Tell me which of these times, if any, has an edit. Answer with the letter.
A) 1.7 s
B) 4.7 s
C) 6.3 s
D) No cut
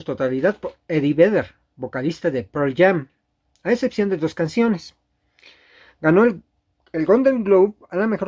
D